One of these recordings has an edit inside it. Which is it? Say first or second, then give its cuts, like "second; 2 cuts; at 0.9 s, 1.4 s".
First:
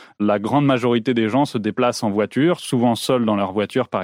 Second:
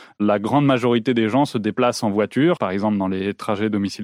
second; 1 cut; at 2.6 s